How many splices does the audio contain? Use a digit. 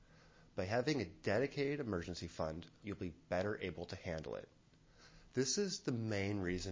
2